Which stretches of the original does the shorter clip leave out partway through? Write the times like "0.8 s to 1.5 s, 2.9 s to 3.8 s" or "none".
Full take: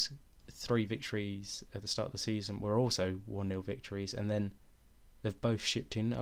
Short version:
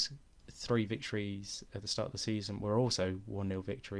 none